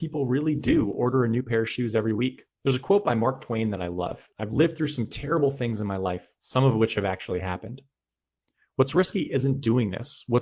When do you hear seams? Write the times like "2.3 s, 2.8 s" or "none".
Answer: 4.3 s